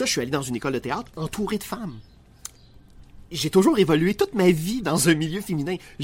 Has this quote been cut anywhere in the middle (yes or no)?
no